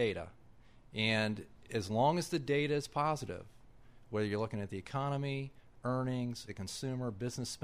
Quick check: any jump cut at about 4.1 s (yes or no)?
no